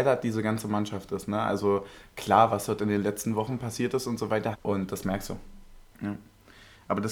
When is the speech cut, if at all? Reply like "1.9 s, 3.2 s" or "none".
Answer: 4.5 s, 5.9 s